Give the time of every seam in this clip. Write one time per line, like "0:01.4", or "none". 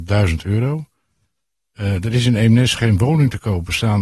none